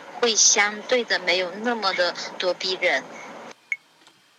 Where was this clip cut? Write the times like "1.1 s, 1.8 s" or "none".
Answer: 2.4 s